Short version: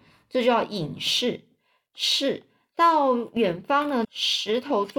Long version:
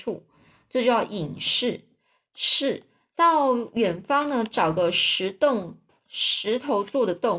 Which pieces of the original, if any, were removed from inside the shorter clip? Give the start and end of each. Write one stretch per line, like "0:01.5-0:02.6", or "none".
0:04.4-0:06.0